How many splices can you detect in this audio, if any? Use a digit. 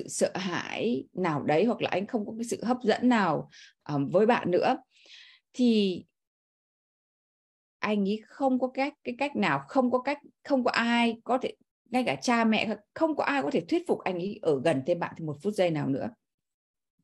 0